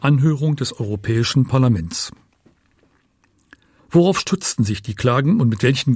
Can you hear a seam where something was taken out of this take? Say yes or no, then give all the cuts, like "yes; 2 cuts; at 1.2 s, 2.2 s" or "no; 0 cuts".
yes; 1 cut; at 3.8 s